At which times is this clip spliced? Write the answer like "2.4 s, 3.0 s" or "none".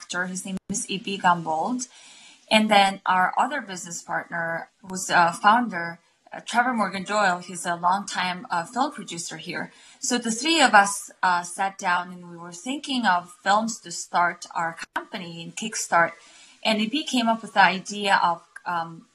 4.7 s